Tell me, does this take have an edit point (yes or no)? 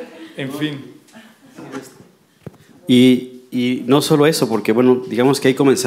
no